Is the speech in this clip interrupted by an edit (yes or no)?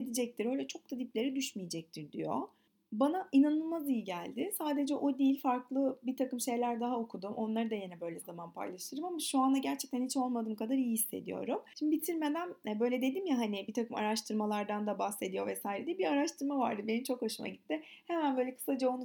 yes